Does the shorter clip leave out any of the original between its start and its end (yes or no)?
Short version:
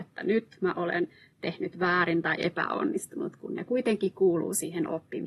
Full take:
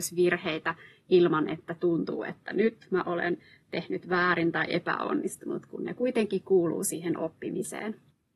no